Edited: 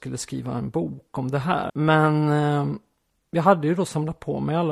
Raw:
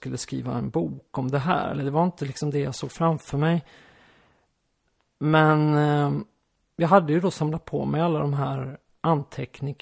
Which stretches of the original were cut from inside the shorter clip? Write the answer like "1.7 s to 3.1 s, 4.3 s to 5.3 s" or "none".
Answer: 1.7 s to 5.1 s

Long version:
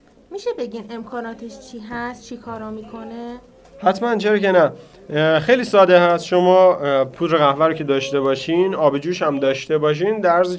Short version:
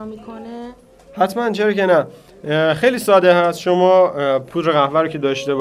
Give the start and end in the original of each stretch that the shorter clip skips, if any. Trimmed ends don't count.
none

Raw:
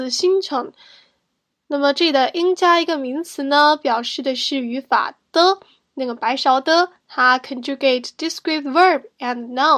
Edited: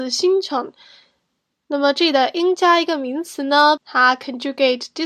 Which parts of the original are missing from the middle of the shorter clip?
3.8 s to 7.0 s

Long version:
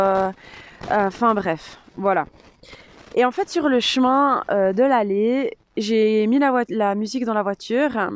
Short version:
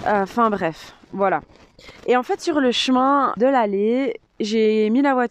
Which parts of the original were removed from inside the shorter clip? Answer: 2.8 s to 3.1 s, 4.5 s to 4.7 s

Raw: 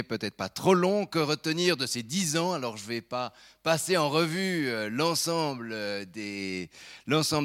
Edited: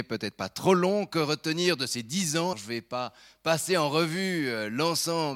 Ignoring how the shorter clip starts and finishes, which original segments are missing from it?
2.5 s to 2.7 s

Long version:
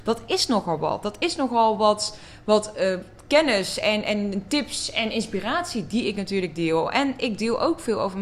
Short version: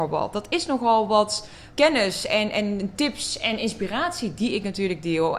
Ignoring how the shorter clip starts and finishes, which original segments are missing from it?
2.4 s to 3.3 s

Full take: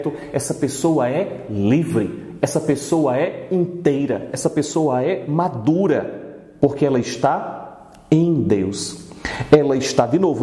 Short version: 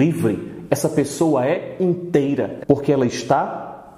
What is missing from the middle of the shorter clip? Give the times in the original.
4.3 s to 6.5 s

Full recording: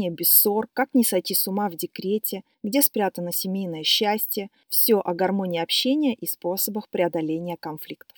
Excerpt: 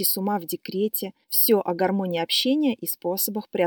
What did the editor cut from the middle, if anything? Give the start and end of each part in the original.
2.5 s to 4.6 s

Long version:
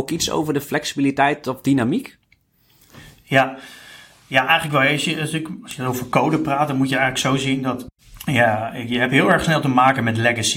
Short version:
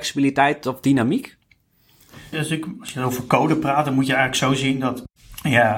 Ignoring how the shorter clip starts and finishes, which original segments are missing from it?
3.1 s to 5.2 s

